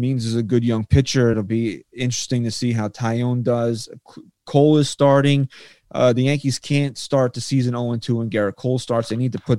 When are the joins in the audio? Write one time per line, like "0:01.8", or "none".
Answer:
none